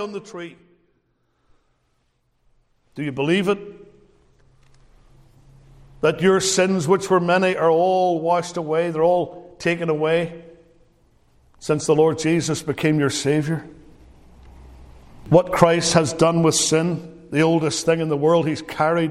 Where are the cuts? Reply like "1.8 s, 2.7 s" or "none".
none

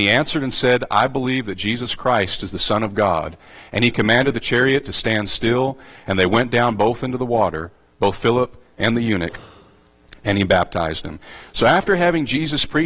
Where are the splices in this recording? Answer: none

